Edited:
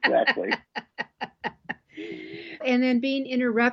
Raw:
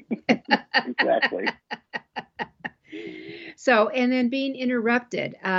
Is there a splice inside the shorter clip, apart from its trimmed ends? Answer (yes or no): yes